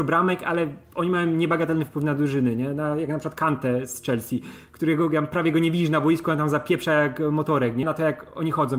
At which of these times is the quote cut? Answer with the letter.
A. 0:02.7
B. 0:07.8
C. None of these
B